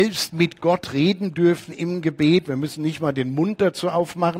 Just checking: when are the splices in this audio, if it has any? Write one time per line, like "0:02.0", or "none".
none